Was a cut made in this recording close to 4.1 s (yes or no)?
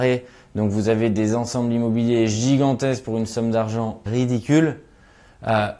yes